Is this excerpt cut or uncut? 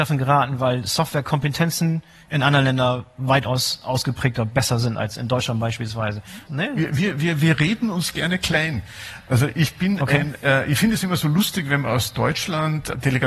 cut